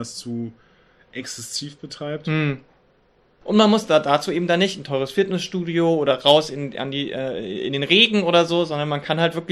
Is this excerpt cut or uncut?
cut